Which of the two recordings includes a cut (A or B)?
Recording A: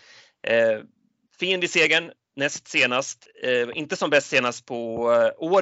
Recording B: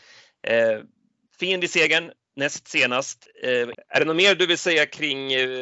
B